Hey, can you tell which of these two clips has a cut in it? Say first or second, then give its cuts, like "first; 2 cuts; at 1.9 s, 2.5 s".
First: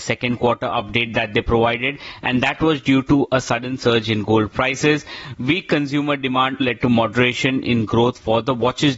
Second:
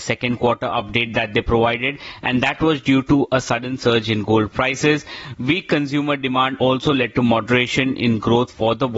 first; 1 cut; at 6.6 s